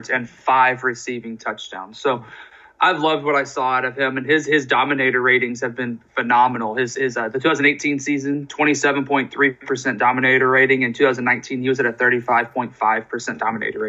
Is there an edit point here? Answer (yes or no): no